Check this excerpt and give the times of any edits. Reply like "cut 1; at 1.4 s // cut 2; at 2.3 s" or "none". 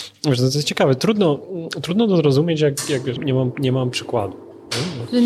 cut 1; at 3.2 s